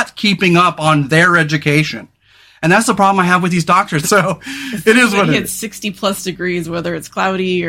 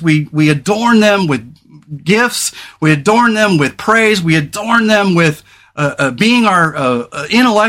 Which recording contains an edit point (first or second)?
first